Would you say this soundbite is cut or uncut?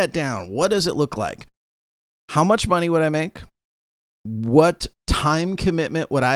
uncut